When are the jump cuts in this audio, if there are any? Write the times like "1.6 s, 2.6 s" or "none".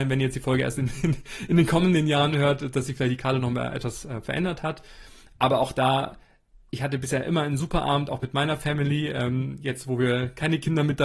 none